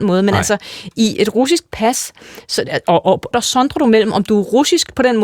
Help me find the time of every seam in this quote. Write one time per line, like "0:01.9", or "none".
0:03.3